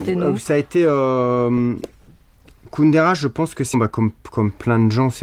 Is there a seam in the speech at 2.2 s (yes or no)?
no